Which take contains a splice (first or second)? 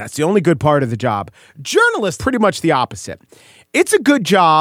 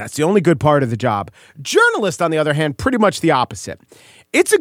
first